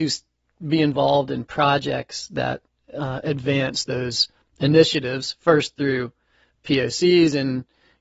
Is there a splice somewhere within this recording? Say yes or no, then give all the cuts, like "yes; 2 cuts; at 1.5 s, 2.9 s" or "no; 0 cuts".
no; 0 cuts